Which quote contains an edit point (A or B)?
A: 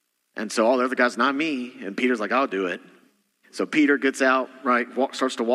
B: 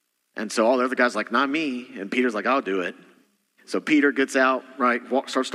A